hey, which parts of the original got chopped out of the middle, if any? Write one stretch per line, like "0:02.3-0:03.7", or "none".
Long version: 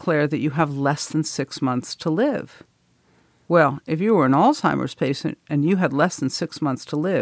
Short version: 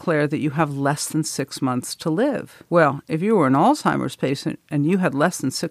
0:02.7-0:03.4